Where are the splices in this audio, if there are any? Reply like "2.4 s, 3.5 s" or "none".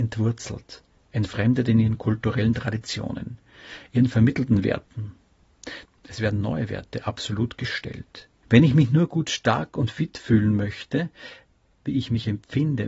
5.8 s, 8.4 s, 11.6 s

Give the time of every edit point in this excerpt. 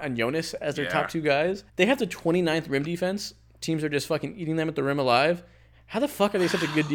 1.7 s, 5.7 s

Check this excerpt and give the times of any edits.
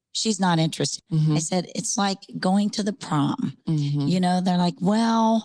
1.0 s

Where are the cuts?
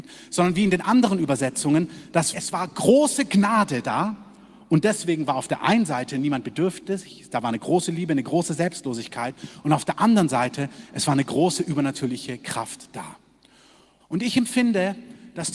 2.3 s, 14.0 s

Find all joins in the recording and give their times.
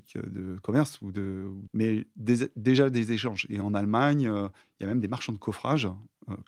1.7 s, 3.5 s

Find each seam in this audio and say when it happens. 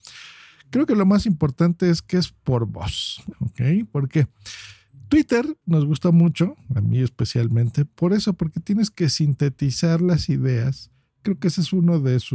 3.3 s

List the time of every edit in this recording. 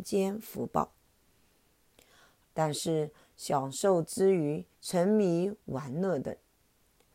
2.5 s, 4.7 s

